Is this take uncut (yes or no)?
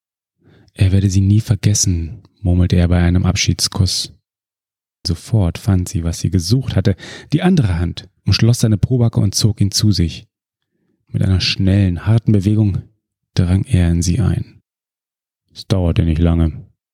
no